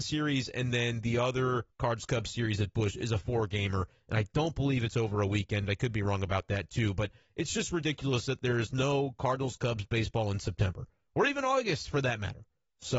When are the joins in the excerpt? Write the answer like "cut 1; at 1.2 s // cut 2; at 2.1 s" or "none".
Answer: none